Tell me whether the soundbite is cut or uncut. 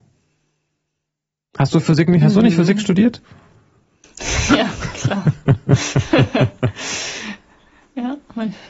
uncut